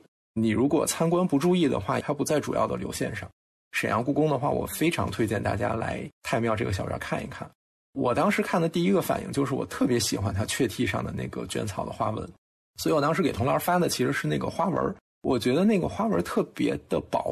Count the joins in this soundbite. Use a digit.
1